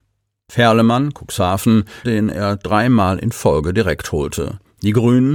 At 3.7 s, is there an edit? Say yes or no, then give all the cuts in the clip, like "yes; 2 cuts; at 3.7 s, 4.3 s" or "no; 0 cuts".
no; 1 cut; at 2.0 s